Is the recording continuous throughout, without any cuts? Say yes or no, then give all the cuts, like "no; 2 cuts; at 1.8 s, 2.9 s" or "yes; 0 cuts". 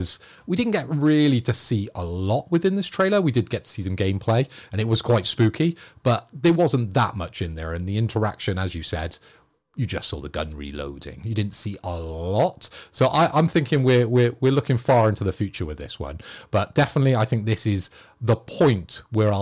yes; 0 cuts